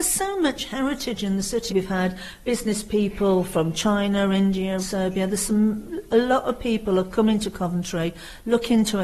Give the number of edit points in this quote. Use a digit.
2